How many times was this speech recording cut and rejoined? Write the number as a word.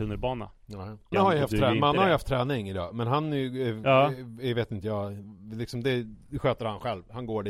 one